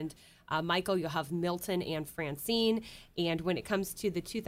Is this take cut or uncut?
uncut